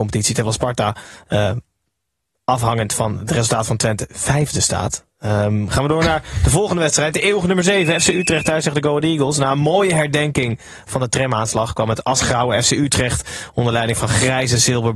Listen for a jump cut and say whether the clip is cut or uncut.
uncut